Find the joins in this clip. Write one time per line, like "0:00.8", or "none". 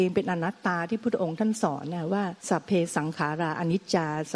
0:02.4